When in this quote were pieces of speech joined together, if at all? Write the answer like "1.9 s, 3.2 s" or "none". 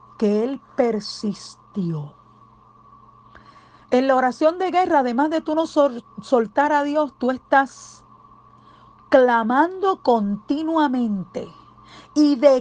none